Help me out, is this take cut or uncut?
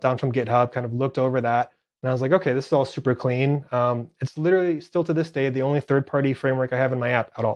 uncut